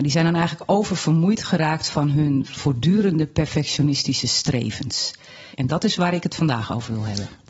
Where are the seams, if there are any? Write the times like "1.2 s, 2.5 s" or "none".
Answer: 5.5 s